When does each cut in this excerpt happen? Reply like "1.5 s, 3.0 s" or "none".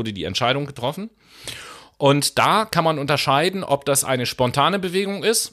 none